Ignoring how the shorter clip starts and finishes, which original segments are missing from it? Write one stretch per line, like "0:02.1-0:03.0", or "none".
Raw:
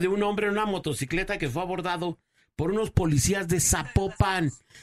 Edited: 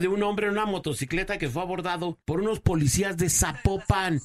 0:02.2-0:02.5